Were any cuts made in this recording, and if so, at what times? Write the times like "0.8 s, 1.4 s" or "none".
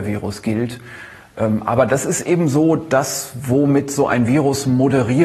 none